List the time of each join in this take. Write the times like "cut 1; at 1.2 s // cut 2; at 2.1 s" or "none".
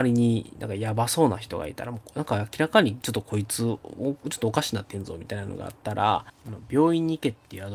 cut 1; at 6.4 s